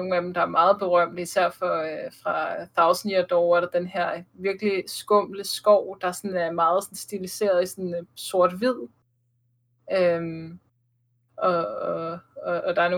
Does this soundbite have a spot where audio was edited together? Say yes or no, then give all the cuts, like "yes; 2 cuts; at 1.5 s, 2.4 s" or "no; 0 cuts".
no; 0 cuts